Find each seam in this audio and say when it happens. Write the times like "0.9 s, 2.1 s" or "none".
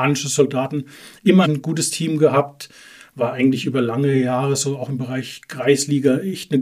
1.4 s